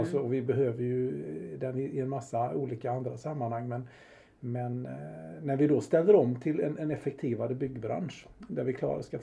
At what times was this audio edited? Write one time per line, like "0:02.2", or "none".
none